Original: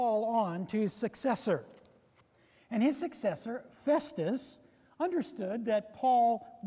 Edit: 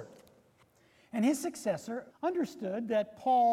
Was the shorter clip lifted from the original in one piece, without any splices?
no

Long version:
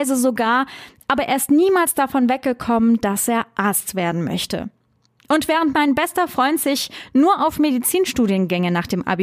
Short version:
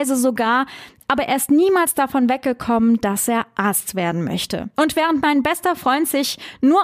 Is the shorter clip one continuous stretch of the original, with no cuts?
no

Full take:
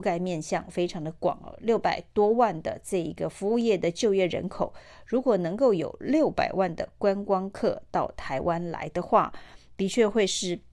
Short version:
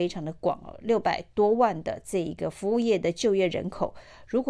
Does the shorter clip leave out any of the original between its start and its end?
no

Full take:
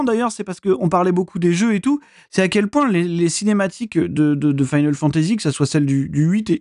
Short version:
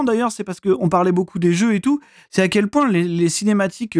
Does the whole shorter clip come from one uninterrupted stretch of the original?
yes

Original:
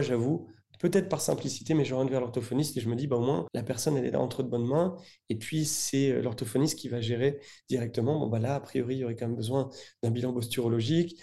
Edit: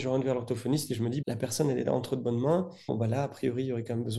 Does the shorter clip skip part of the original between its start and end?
yes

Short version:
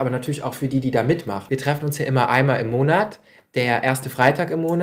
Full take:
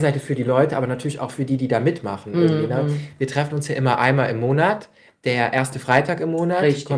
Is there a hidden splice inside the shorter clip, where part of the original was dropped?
yes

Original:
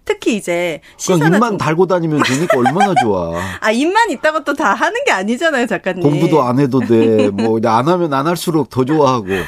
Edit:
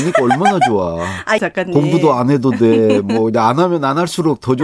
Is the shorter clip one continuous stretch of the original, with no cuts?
no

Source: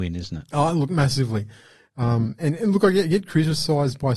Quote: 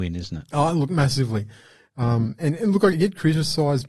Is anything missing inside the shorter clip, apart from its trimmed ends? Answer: yes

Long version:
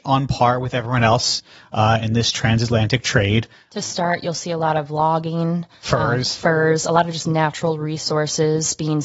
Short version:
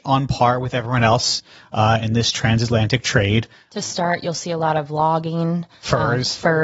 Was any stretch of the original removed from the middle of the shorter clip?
no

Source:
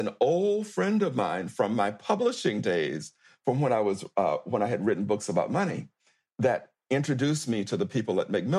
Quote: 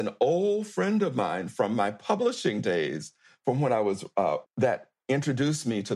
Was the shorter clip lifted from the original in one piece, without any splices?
no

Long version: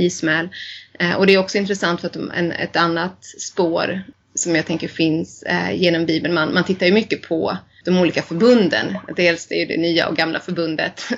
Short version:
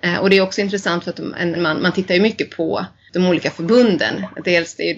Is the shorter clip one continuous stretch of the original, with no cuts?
no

